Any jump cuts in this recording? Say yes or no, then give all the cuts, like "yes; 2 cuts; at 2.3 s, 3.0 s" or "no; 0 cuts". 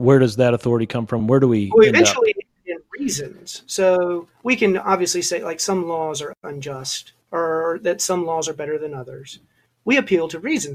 yes; 3 cuts; at 1.2 s, 7.2 s, 9.7 s